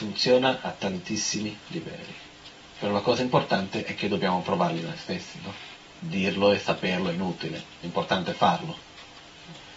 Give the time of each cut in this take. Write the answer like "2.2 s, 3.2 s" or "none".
none